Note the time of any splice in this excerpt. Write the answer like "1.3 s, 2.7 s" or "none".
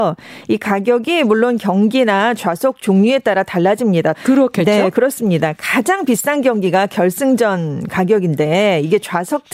4.1 s

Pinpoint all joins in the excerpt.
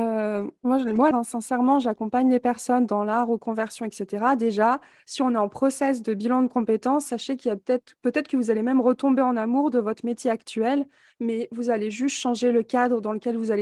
1.1 s

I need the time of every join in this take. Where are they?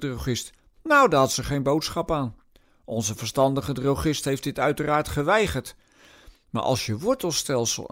none

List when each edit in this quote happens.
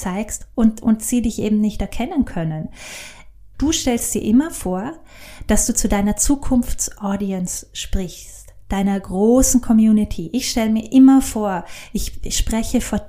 3.5 s

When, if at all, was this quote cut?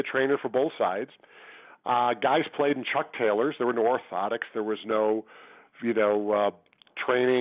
none

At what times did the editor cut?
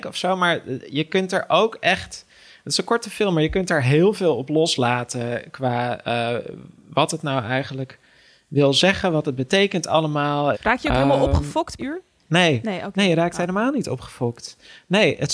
10.5 s, 11.8 s

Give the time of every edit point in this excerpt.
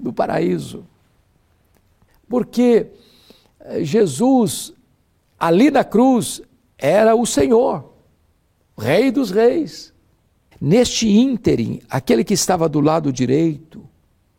2.1 s, 10.5 s

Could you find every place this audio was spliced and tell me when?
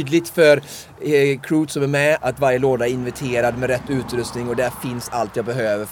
2.2 s

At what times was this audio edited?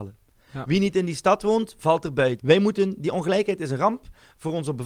2.4 s

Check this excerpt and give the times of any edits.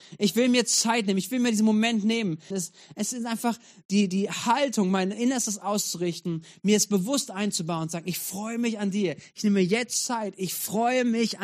2.5 s

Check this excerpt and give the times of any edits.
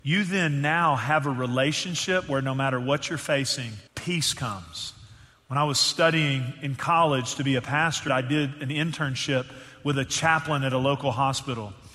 3.9 s, 8.1 s

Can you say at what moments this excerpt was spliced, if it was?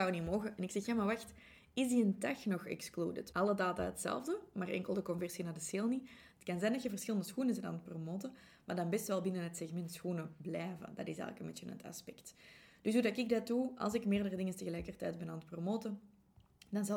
3.3 s, 6.3 s

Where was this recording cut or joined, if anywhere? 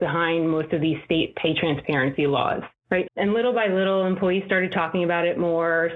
3.1 s

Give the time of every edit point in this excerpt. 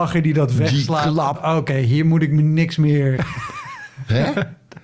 1.3 s, 3.2 s

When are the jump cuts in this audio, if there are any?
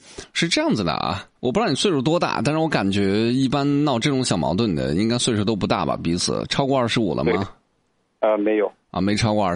1.4 s

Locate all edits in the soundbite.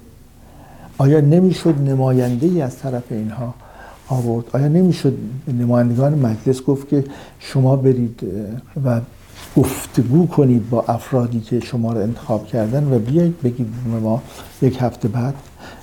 8.7 s

